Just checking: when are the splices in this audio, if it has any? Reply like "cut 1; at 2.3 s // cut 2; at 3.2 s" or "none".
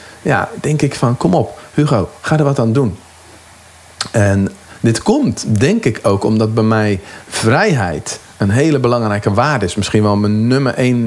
none